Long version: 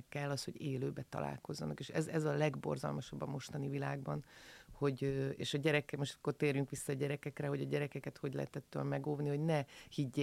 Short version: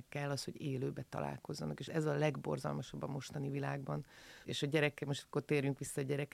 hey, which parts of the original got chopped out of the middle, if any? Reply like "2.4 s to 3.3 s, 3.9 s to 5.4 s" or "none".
1.9 s to 2.1 s, 4.6 s to 5.4 s